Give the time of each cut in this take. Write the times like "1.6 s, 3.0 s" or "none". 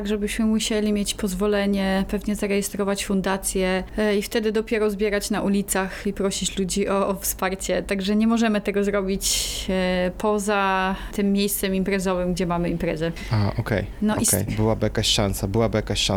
14.5 s

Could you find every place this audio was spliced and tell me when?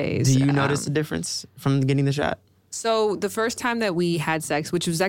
none

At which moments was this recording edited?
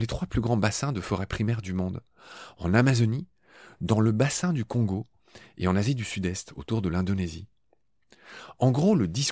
none

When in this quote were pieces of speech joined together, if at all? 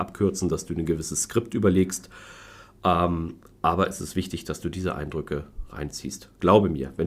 none

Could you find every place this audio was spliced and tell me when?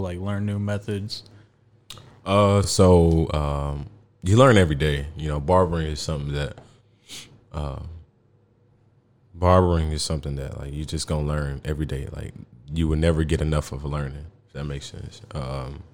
none

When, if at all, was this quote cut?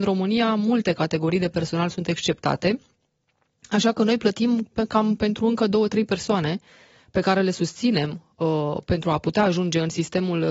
none

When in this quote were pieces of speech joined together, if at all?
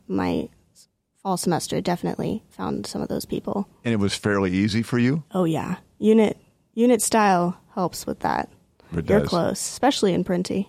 none

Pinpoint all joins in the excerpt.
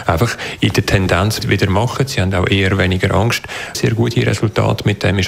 1.4 s, 3.7 s

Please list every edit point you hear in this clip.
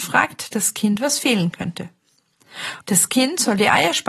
2.8 s

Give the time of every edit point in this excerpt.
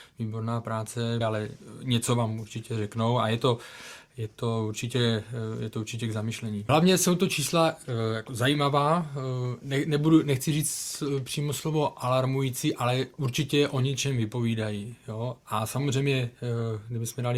1.2 s, 6.7 s

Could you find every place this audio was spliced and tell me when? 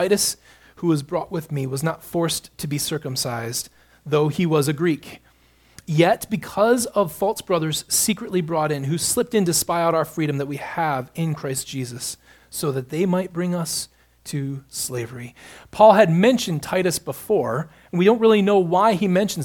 none

